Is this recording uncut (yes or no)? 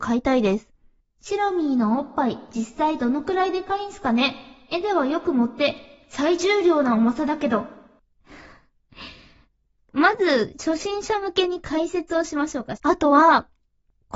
no